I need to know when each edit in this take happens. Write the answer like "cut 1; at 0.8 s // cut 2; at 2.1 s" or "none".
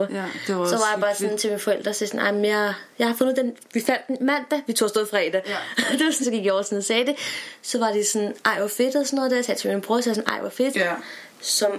cut 1; at 3.6 s // cut 2; at 6.2 s // cut 3; at 10.7 s